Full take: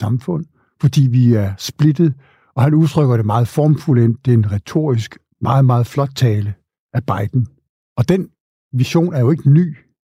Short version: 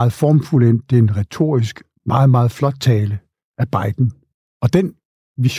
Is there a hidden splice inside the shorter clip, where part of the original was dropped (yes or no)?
no